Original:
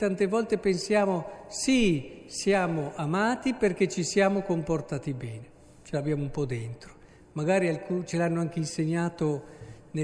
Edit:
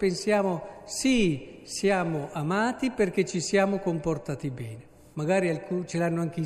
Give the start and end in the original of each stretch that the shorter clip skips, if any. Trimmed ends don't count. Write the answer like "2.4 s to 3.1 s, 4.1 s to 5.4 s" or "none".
5.8 s to 7.3 s